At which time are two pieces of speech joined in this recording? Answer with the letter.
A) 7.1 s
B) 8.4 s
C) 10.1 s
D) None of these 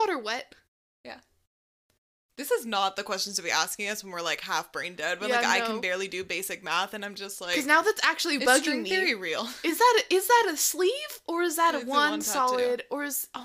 B